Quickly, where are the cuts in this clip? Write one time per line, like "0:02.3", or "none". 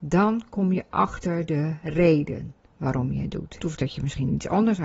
0:03.6